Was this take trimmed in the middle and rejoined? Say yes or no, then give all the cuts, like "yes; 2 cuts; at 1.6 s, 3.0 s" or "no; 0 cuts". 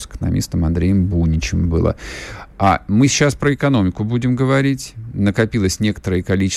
no; 0 cuts